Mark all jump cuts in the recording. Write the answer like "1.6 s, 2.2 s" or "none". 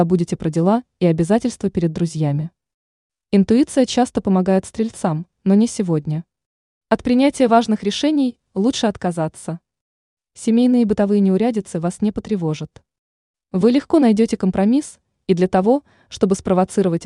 none

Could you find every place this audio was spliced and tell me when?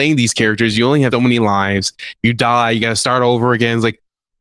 1.1 s

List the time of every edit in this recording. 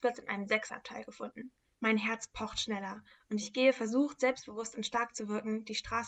1.7 s

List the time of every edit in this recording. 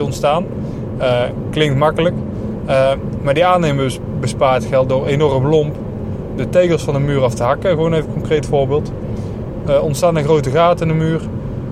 2.6 s

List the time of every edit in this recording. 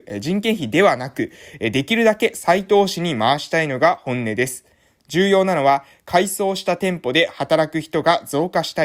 none

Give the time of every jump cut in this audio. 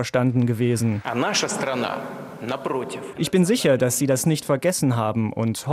3.1 s

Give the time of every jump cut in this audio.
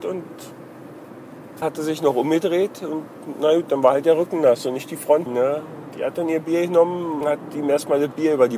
1.6 s, 5.3 s, 7.2 s

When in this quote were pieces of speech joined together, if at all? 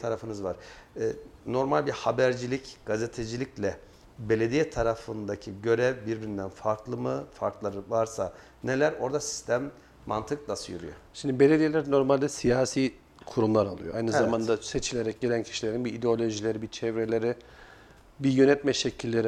none

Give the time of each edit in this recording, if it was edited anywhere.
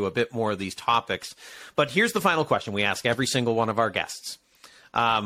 none

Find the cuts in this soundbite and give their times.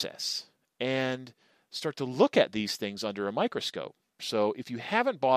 4.2 s

